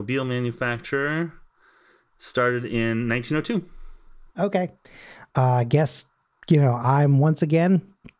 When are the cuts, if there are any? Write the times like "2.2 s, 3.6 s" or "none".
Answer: 4.3 s